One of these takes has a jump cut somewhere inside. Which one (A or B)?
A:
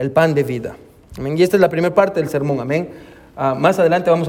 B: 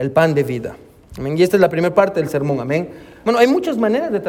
B